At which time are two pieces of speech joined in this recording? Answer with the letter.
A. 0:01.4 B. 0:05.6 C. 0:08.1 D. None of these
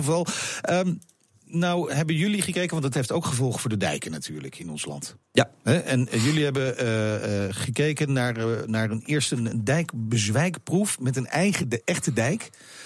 D